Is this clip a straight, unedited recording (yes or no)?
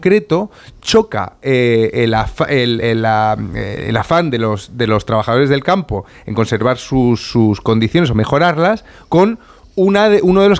yes